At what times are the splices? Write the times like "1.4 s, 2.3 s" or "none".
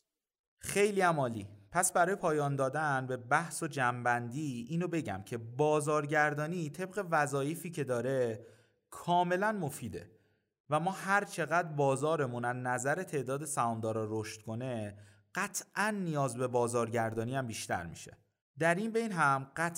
none